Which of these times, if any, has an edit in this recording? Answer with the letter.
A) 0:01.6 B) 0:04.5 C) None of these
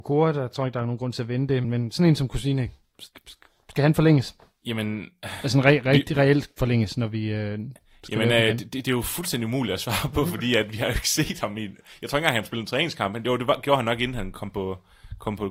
A